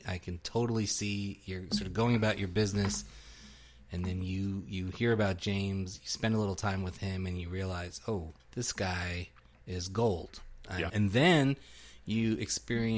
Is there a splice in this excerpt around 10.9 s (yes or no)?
yes